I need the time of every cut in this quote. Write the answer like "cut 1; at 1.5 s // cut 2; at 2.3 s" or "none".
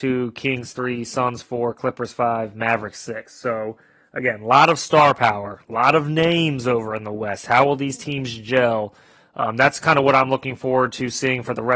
none